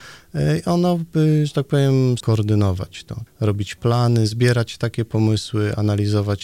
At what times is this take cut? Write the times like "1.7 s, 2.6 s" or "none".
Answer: 2.2 s, 3.3 s